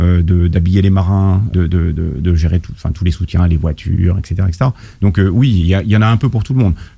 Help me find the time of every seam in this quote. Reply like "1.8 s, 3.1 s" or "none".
1.5 s